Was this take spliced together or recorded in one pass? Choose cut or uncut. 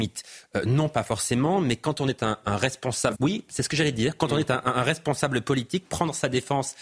cut